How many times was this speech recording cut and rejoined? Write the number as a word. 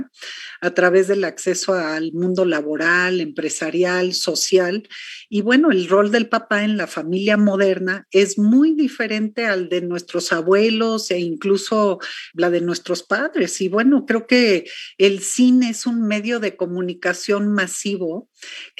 one